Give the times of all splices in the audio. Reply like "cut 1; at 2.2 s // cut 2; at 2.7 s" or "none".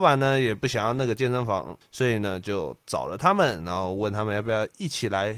cut 1; at 1.8 s